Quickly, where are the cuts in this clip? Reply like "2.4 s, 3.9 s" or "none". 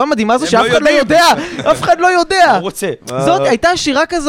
none

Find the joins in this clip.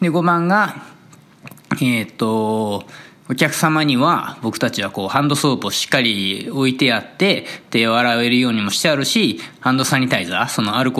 none

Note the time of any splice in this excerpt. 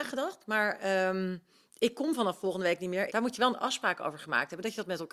3.1 s

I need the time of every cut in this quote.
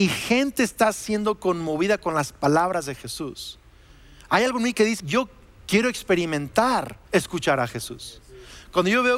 5.0 s, 7.1 s

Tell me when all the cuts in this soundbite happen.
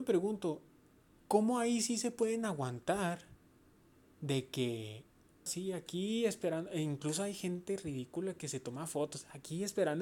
5.5 s

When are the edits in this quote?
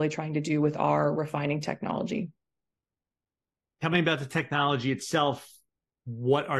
none

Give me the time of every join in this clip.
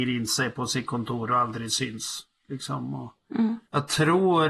none

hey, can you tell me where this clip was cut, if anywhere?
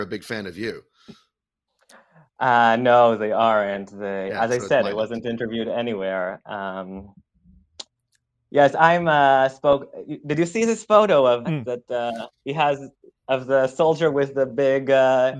11.4 s

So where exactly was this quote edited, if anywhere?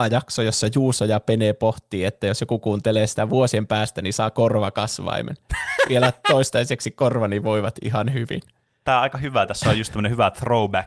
none

